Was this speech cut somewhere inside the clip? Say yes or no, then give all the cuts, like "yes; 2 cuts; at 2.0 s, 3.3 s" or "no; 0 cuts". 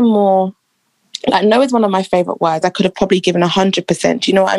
yes; 1 cut; at 2.6 s